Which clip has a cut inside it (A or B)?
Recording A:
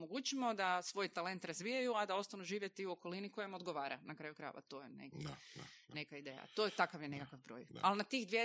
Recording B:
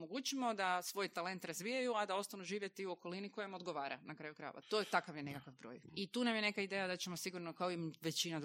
B